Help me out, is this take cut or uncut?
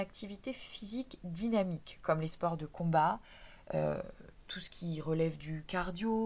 uncut